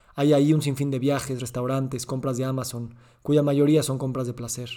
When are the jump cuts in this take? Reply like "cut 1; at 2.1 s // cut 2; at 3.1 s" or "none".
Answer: none